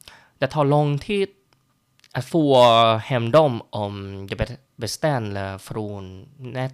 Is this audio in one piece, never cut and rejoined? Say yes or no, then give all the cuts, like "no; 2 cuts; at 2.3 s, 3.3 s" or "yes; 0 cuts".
yes; 0 cuts